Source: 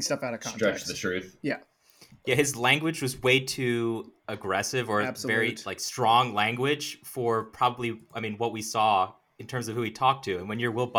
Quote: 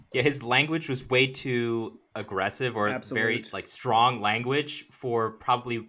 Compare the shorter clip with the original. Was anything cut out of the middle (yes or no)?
no